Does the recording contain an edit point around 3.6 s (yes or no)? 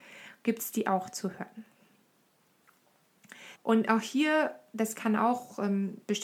yes